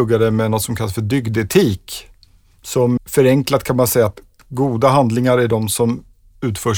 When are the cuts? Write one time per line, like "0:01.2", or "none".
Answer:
0:03.0